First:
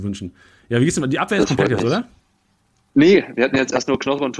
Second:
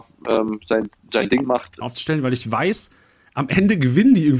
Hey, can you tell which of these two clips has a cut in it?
second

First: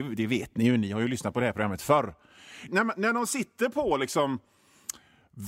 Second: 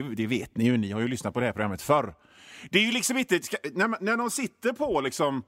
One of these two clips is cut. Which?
first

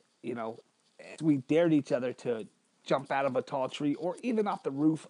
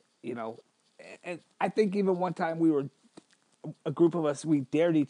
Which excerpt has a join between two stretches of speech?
first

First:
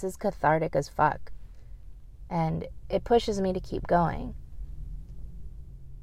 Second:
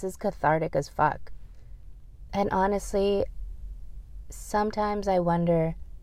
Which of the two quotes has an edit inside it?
second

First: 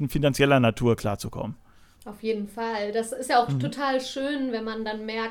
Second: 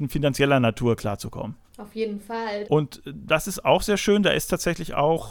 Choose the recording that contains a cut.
second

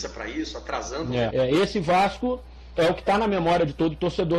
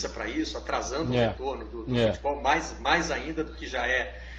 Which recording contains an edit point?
first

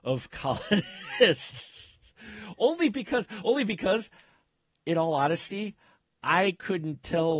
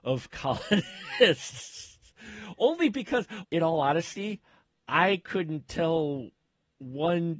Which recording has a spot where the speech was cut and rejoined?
second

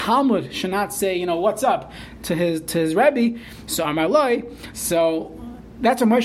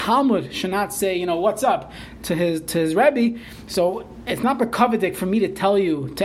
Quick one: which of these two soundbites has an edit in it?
first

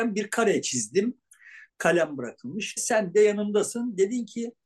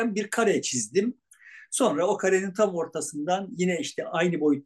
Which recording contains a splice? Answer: first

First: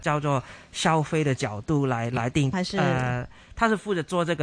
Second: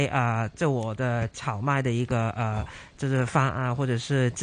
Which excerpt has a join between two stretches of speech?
first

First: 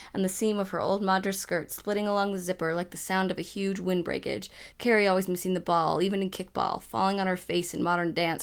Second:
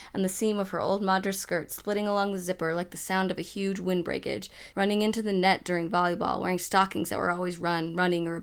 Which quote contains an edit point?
second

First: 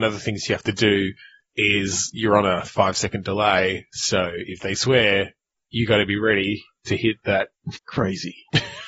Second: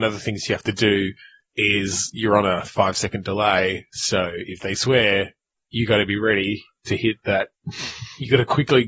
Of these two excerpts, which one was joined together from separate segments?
first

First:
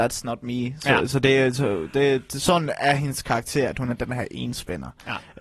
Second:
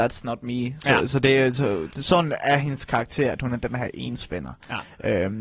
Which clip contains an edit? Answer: second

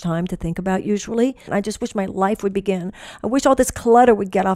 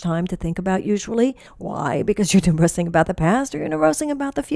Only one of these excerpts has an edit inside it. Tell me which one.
first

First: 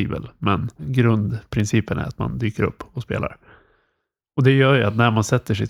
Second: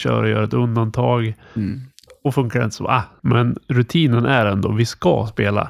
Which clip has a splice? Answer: second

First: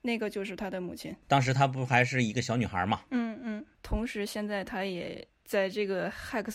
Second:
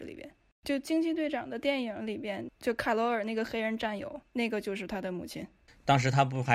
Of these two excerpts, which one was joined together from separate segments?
first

